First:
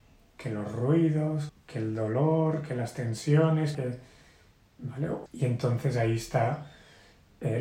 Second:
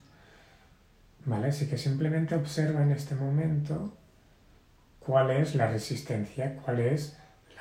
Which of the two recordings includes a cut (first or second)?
first